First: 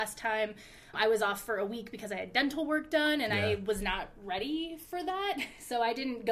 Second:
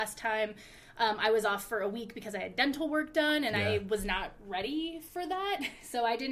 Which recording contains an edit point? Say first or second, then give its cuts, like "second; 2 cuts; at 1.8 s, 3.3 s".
first; 1 cut; at 0.9 s